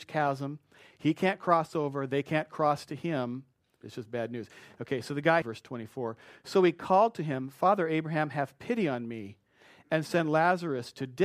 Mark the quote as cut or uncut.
cut